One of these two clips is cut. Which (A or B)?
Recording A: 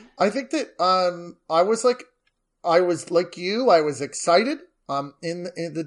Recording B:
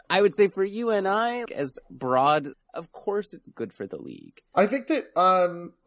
B